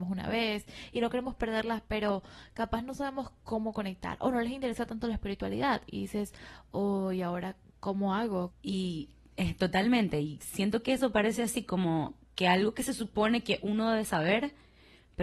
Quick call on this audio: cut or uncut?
cut